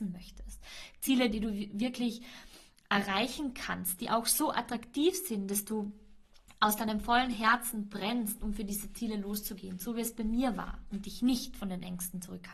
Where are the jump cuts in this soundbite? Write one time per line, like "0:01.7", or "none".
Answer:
0:01.3